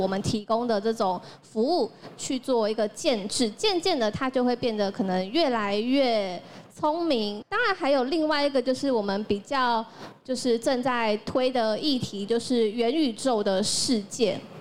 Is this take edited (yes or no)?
yes